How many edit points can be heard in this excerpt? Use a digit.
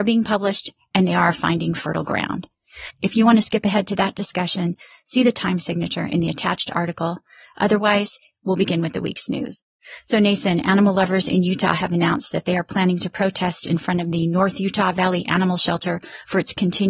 0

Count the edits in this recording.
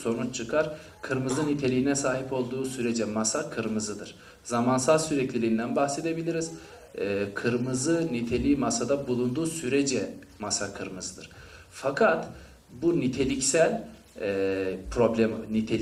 0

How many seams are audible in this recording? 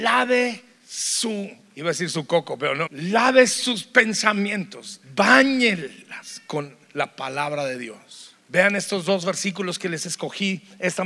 1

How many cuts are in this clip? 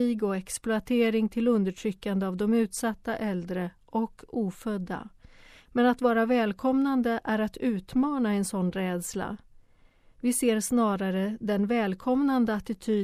1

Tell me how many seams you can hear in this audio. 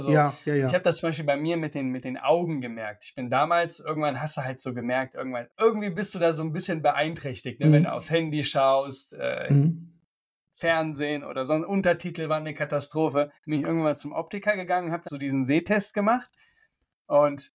3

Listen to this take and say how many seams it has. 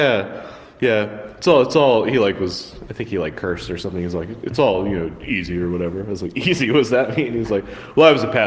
0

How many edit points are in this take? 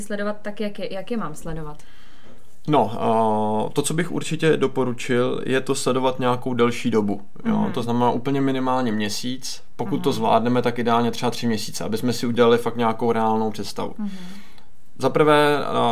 0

